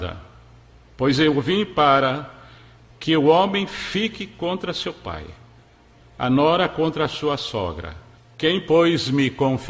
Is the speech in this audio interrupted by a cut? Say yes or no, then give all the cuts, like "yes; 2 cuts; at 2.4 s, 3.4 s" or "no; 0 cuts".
yes; 2 cuts; at 6.0 s, 8.2 s